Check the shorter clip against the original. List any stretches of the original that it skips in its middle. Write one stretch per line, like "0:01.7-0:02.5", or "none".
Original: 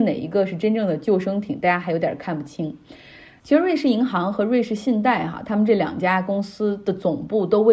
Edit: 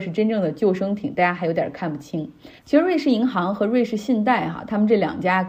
0:03.0-0:03.4

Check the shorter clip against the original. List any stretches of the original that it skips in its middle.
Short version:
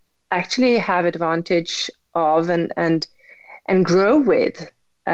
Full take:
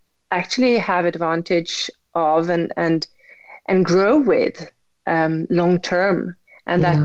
none

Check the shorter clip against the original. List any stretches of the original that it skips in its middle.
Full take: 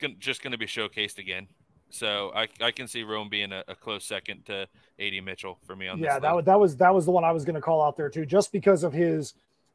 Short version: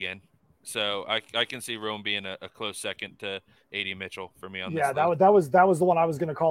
none

